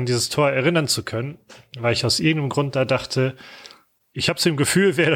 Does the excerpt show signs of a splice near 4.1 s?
yes; 1 cut; at 4.1 s

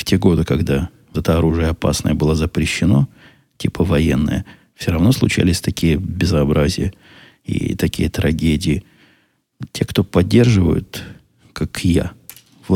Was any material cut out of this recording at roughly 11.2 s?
no; 1 cut; at 1.1 s

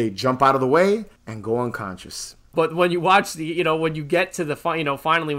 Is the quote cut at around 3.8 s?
no; 2 cuts; at 1.2 s, 2.5 s

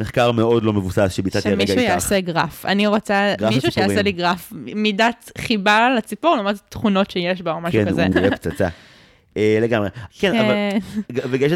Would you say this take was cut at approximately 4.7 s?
no; 2 cuts; at 8.1 s, 10.1 s

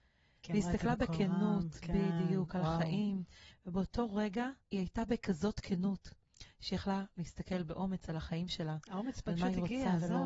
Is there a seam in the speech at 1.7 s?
no; 2 cuts; at 3.5 s, 4.6 s

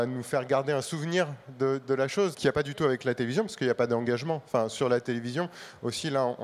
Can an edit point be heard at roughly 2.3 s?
yes; 1 cut; at 2.3 s

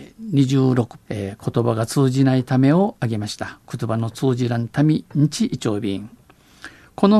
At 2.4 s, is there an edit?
no; 2 cuts; at 1.0 s, 3.6 s

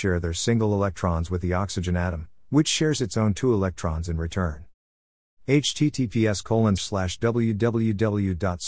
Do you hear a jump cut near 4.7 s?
no; 1 cut; at 6.8 s

